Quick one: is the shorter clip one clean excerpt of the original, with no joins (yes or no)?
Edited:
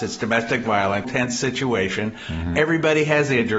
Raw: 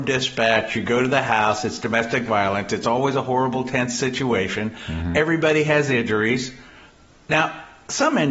no